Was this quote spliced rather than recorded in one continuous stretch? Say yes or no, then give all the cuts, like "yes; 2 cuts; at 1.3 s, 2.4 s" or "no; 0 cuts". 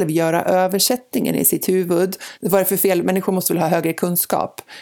yes; 1 cut; at 2.4 s